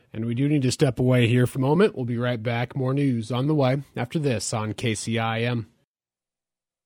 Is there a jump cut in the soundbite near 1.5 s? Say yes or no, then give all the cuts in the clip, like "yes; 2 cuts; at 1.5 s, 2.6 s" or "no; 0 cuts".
yes; 1 cut; at 1.5 s